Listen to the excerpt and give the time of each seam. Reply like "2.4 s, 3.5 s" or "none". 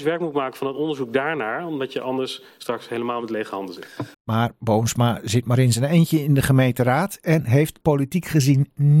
4.1 s, 7.8 s